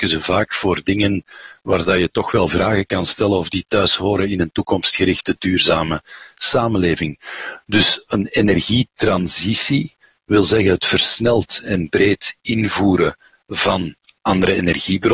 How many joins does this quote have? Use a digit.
0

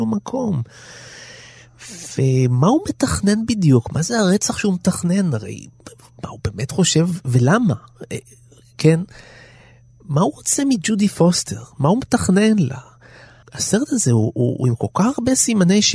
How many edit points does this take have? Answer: 0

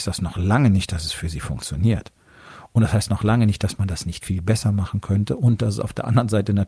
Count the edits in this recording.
1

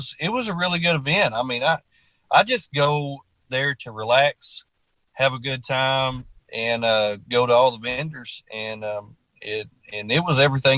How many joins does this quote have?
1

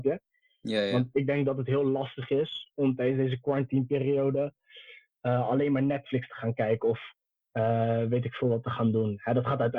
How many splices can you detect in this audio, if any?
0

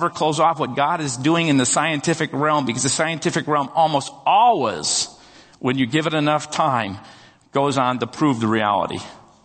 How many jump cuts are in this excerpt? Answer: 0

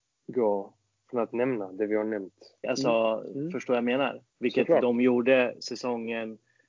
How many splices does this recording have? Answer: 2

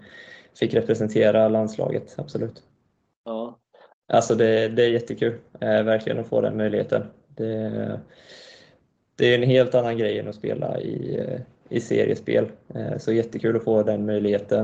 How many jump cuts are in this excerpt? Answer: 1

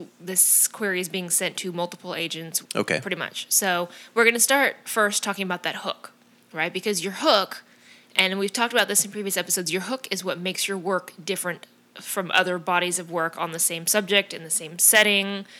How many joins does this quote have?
1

